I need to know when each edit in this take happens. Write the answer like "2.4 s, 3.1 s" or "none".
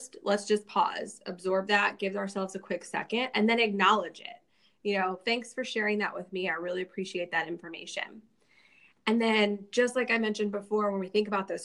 none